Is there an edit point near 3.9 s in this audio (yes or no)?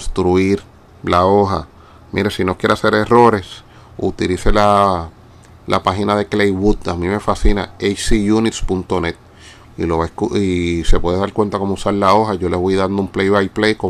no